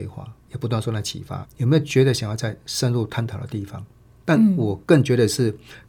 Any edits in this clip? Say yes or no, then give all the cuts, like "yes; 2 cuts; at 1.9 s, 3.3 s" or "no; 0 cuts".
yes; 2 cuts; at 1.4 s, 4.2 s